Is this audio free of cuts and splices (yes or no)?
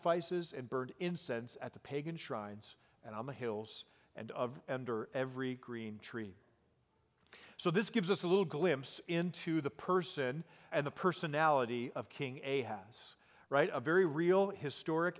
no